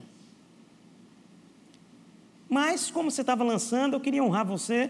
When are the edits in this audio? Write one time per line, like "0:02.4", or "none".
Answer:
none